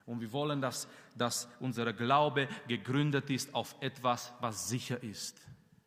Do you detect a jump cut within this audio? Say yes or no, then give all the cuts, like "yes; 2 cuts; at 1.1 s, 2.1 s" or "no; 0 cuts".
no; 0 cuts